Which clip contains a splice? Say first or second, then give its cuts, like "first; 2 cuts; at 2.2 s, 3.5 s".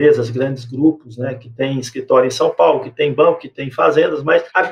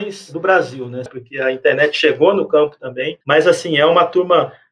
second; 2 cuts; at 1.1 s, 3.2 s